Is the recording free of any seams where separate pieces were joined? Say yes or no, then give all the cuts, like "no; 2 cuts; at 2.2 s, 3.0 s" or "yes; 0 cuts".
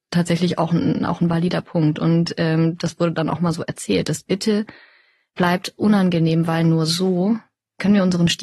yes; 0 cuts